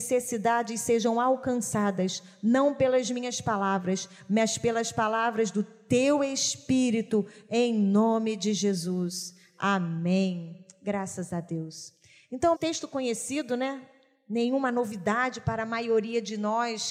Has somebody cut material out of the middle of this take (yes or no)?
yes